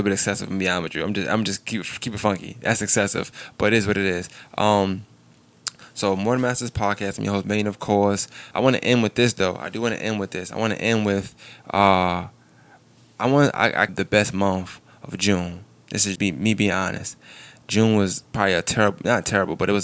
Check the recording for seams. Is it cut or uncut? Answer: cut